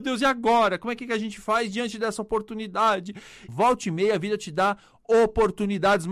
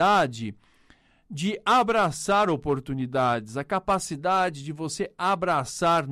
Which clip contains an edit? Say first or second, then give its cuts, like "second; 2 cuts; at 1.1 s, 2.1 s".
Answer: first; 1 cut; at 3.5 s